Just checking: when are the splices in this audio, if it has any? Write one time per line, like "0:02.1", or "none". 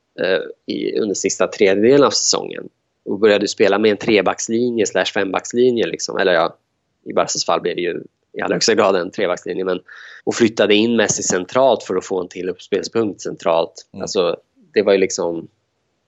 0:10.2
0:13.9